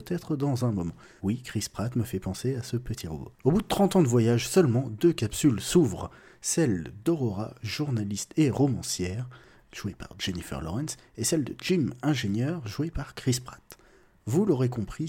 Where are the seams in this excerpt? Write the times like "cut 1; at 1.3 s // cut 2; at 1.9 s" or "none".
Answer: cut 1; at 1.2 s // cut 2; at 3.4 s